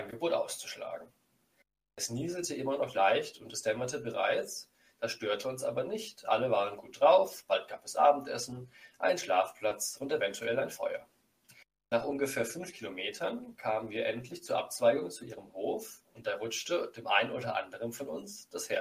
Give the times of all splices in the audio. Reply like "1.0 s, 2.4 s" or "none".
1.8 s